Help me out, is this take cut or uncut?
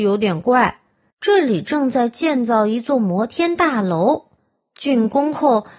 cut